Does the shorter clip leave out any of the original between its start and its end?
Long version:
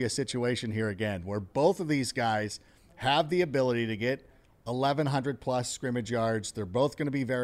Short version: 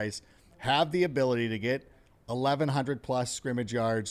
no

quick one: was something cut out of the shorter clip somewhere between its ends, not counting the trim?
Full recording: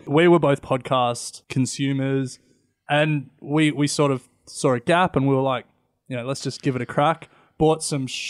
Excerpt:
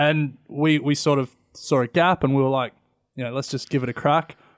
no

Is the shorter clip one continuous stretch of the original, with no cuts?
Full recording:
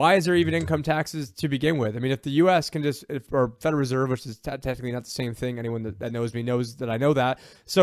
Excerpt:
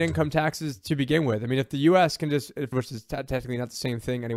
no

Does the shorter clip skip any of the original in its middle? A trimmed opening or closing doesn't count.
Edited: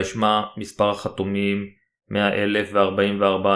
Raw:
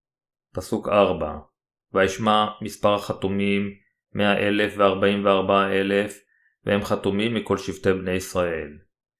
no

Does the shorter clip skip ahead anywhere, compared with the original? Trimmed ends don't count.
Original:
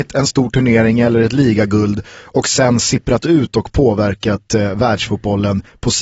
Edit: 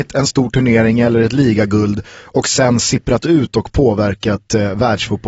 no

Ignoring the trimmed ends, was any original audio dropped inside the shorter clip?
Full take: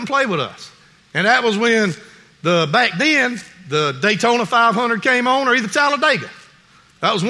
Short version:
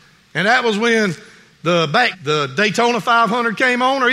yes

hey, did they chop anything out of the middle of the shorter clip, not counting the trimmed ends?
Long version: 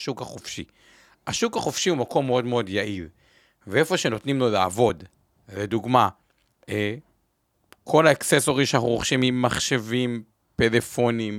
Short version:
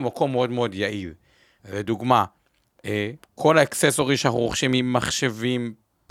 yes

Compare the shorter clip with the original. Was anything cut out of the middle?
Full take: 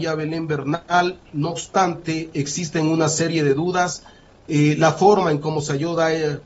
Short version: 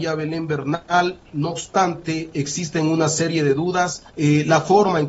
yes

